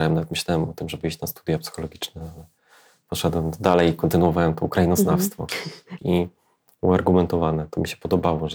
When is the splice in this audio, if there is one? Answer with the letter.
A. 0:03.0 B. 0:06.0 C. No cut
B